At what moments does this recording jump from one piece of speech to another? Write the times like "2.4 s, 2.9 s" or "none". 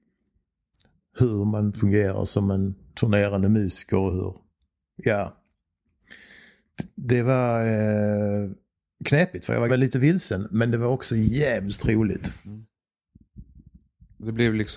9.7 s